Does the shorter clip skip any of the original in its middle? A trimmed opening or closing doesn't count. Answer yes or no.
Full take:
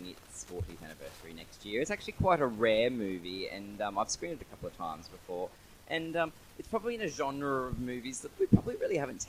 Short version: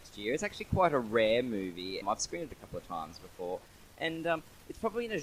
yes